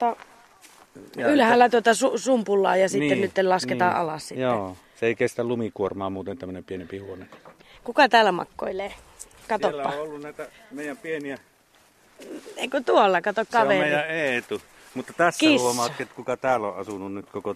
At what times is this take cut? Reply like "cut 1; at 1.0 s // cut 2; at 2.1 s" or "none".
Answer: cut 1; at 13.5 s